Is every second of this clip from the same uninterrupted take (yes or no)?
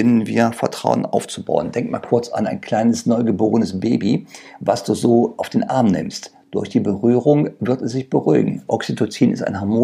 no